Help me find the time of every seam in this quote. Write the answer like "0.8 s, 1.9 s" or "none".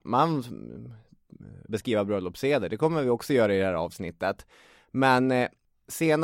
1.7 s